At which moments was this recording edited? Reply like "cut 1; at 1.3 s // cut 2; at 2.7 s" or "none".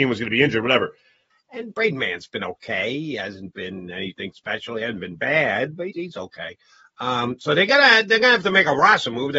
cut 1; at 1.3 s // cut 2; at 5.9 s